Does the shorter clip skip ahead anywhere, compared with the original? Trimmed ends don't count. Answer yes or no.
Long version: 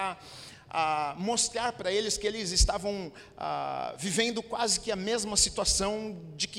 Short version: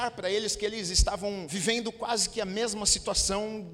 yes